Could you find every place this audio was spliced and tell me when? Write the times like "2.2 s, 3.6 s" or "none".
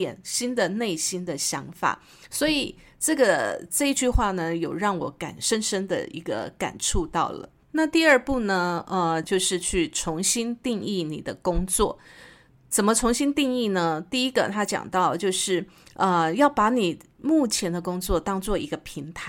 9.2 s